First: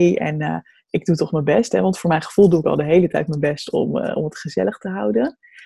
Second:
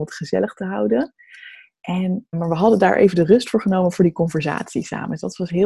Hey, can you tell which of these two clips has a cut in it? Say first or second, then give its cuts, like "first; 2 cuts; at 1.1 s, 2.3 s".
second; 1 cut; at 2.3 s